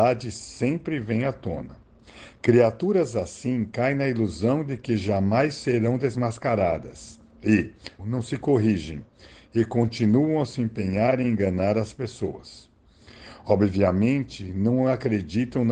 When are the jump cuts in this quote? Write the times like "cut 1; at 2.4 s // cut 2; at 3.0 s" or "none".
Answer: cut 1; at 8.0 s